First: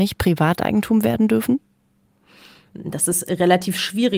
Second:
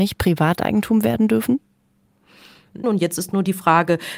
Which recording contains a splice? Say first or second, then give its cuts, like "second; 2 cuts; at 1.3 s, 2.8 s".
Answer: second; 1 cut; at 2.8 s